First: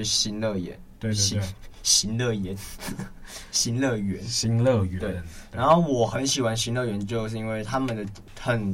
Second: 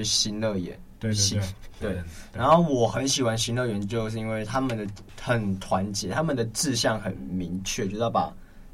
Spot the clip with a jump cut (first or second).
second